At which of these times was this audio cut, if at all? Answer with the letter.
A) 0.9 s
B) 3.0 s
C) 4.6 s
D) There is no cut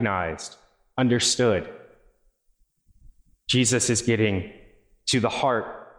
D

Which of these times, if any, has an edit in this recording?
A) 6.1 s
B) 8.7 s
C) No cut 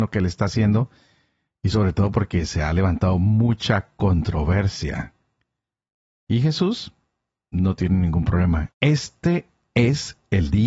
B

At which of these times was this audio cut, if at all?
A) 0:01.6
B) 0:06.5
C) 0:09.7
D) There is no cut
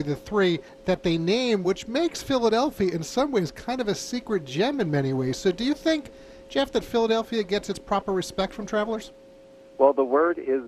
D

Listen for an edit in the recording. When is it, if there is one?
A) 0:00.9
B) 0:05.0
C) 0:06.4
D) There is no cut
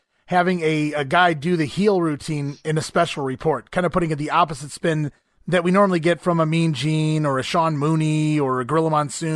D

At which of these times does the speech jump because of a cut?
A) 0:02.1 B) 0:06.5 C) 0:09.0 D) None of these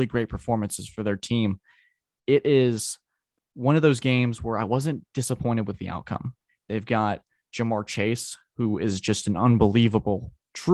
B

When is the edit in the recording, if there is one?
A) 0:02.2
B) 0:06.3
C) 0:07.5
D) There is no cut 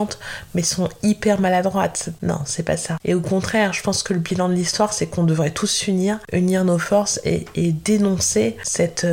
A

